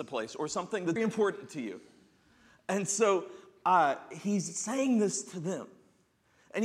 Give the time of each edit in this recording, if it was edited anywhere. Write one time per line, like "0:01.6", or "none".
0:01.0